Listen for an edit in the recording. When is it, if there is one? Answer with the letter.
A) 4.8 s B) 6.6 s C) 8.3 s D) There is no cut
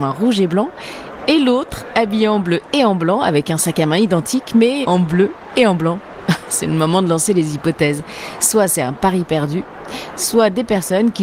A